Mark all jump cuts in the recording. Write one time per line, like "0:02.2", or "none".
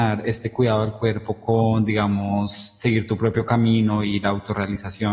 none